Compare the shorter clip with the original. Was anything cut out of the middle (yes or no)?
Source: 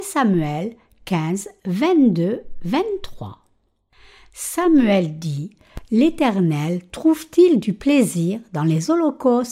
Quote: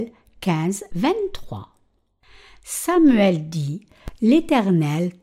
yes